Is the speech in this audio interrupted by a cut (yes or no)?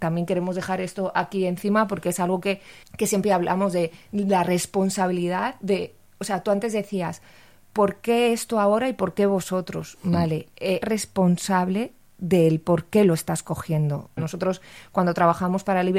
yes